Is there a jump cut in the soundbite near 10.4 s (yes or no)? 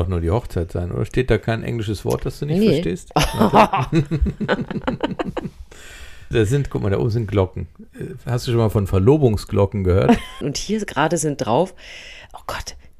yes